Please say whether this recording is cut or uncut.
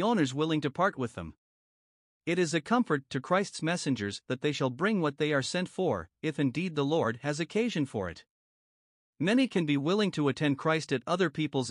cut